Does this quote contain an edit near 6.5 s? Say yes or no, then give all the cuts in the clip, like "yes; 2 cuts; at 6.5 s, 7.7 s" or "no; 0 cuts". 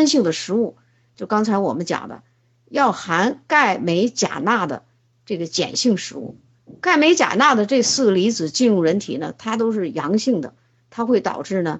no; 1 cut; at 1.1 s